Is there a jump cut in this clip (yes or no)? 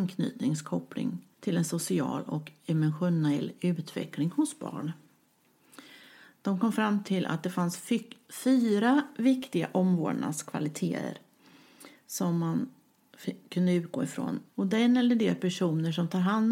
yes